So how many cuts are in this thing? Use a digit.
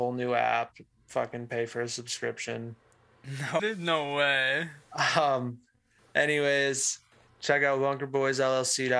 1